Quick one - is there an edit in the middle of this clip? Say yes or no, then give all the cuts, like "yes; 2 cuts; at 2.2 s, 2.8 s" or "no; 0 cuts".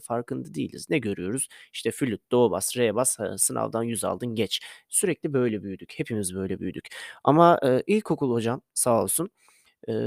no; 0 cuts